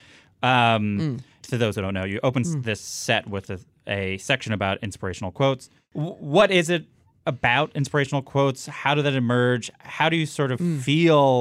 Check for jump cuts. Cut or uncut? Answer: uncut